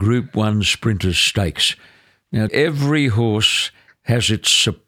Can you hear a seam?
yes; 1 cut; at 2.5 s

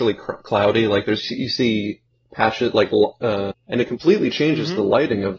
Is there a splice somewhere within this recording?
yes; 1 cut; at 3.5 s

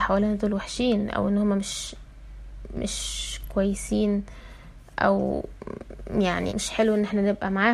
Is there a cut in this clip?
yes; 1 cut; at 6.5 s

